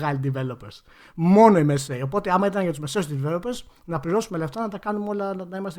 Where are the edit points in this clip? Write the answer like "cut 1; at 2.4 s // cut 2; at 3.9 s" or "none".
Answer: none